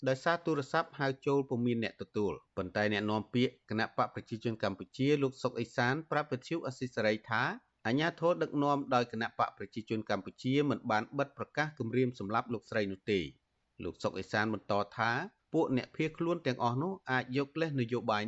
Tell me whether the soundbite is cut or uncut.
cut